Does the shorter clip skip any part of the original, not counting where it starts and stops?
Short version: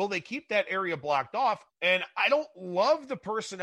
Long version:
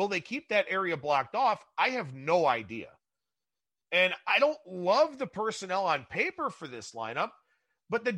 yes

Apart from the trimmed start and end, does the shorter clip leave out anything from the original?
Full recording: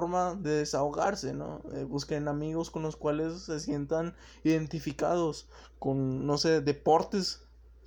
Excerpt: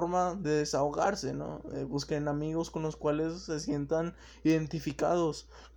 no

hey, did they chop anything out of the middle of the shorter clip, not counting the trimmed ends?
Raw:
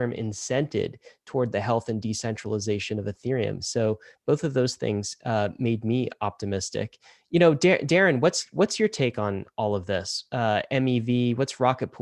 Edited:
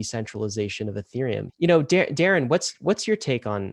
yes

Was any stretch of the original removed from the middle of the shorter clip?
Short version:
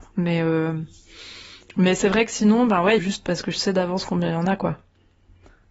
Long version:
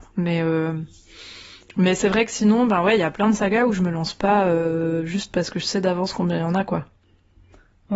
yes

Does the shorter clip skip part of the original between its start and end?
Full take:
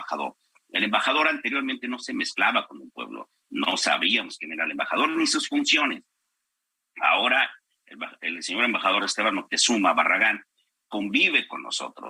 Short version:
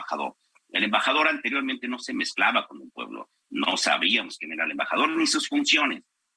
no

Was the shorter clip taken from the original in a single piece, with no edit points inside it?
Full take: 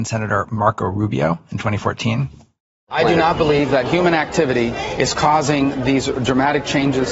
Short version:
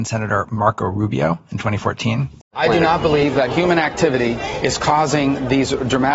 no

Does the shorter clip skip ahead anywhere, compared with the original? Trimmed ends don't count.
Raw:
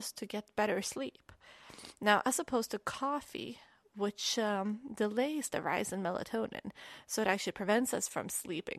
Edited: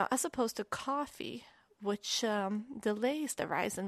no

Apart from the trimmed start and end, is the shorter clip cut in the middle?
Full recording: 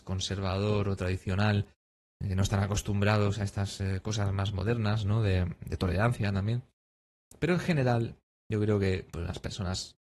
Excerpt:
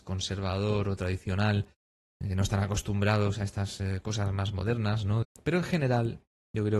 yes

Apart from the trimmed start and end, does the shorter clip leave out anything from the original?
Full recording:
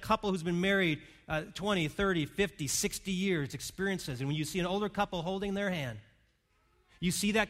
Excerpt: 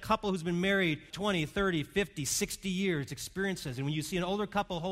yes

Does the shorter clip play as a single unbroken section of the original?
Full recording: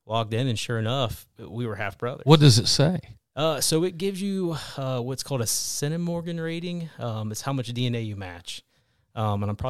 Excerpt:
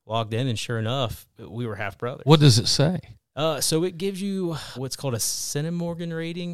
no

